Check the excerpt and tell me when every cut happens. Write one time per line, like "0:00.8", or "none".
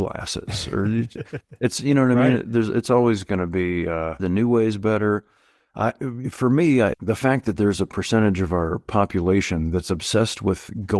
0:04.2
0:06.9